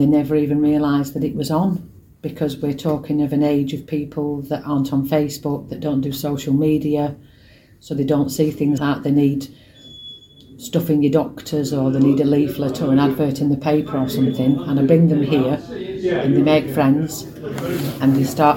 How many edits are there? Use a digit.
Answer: 1